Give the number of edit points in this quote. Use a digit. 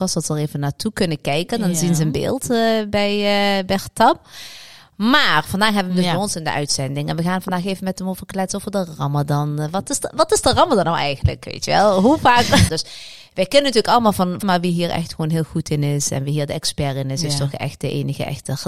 2